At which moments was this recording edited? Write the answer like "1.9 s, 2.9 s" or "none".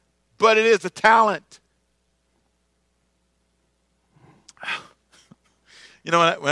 none